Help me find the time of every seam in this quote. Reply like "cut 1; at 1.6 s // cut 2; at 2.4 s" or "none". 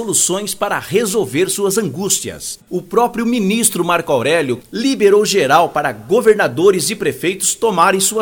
cut 1; at 2.6 s // cut 2; at 4.6 s